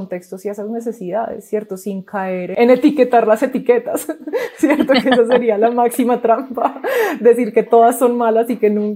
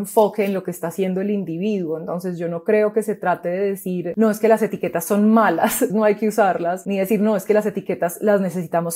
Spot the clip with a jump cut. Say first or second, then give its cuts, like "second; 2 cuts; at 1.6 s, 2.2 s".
second; 1 cut; at 5.9 s